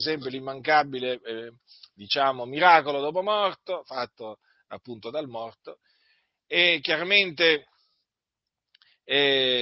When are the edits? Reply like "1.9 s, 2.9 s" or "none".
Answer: none